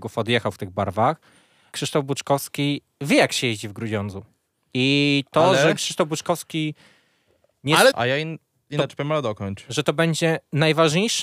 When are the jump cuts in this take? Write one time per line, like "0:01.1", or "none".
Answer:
0:01.7
0:07.9